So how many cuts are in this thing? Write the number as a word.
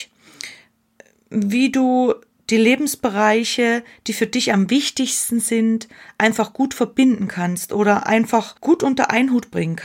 one